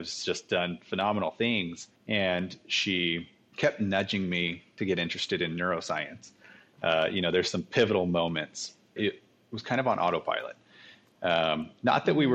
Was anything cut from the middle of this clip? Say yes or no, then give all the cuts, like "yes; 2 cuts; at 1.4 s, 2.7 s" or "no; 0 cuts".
yes; 2 cuts; at 6.8 s, 9.0 s